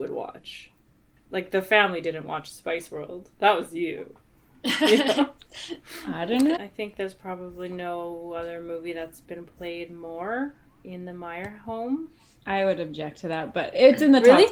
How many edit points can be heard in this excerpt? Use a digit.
2